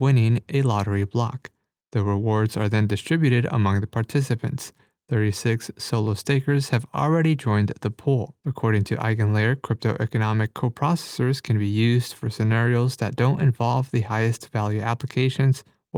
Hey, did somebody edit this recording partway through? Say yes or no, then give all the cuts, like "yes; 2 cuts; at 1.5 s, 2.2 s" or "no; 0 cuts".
yes; 1 cut; at 8.4 s